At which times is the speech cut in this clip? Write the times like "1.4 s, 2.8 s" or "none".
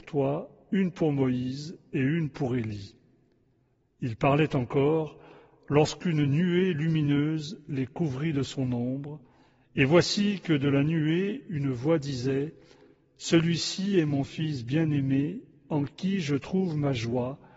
none